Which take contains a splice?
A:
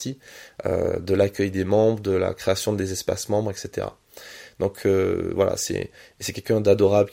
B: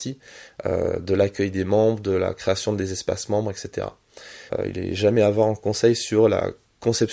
B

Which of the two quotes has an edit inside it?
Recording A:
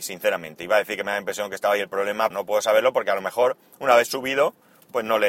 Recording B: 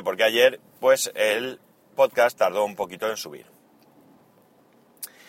A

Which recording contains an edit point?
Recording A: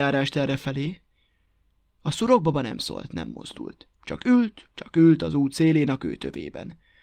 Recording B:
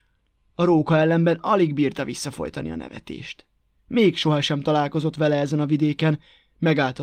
B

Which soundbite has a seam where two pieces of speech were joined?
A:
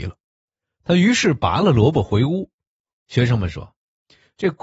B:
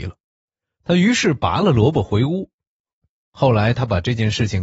A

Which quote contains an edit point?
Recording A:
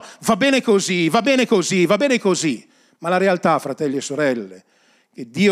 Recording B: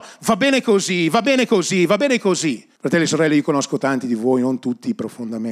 B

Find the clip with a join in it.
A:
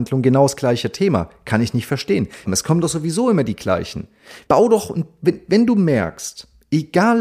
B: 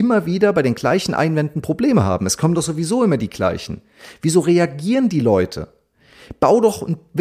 A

